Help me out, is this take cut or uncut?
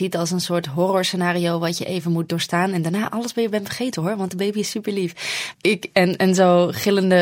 cut